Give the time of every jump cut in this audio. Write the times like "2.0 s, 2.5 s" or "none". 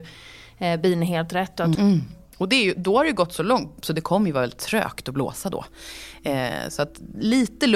1.8 s, 3.8 s